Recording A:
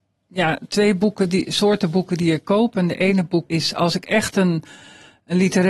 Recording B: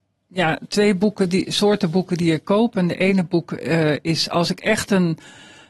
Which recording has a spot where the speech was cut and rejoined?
A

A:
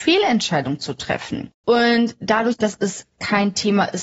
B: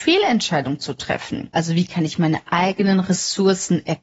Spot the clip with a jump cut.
B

